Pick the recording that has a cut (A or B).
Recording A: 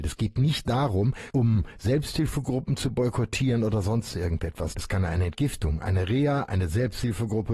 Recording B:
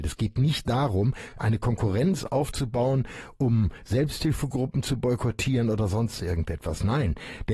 A